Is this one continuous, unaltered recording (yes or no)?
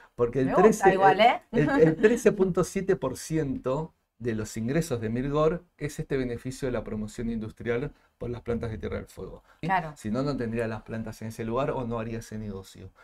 no